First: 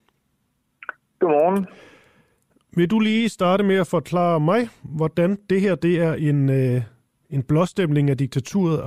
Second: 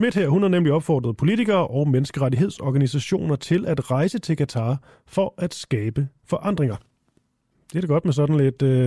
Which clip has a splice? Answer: second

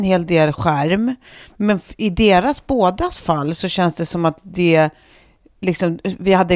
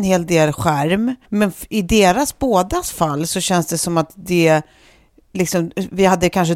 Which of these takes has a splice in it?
second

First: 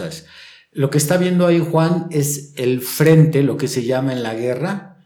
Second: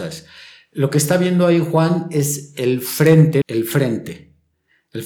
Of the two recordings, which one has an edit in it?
second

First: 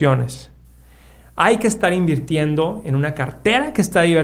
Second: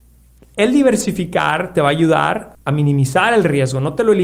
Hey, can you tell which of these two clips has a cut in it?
second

